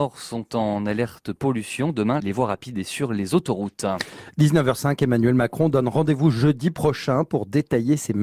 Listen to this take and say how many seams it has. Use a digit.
1